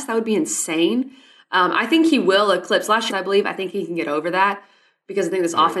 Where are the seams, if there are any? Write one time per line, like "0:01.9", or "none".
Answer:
0:03.1